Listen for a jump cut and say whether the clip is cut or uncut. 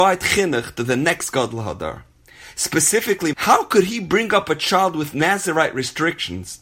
cut